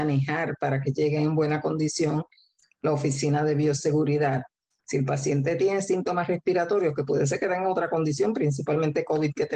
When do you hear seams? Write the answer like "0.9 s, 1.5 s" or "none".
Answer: 4.8 s

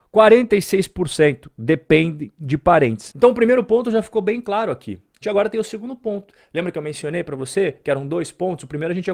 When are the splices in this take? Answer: 3.1 s, 5.2 s

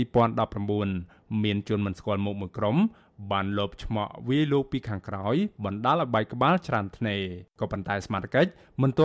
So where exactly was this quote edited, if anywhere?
7.5 s

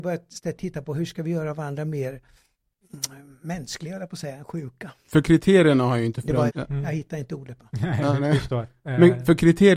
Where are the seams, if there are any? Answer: 6.5 s

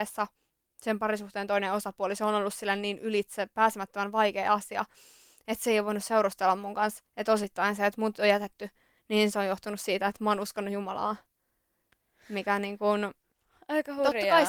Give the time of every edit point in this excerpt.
none

